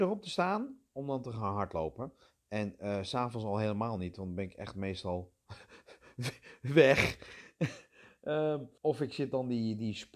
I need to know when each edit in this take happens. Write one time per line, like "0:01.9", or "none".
0:08.8